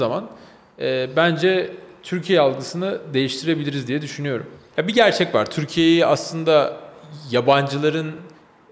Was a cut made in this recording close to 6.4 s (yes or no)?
no